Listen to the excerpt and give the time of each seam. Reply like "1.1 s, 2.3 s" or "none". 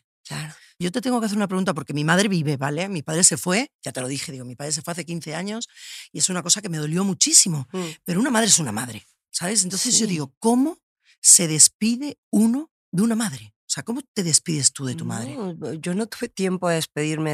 none